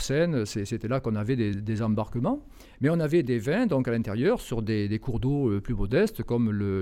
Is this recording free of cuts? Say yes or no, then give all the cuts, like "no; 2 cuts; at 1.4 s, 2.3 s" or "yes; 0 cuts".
yes; 0 cuts